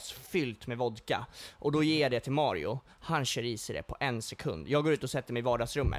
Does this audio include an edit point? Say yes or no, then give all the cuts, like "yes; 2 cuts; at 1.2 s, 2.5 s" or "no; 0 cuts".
no; 0 cuts